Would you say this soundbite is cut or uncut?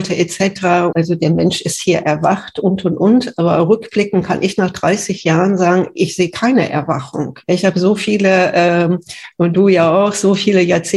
cut